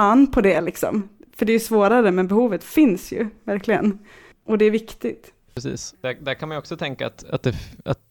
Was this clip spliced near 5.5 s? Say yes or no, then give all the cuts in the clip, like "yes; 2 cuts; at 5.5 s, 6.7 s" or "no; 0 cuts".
no; 0 cuts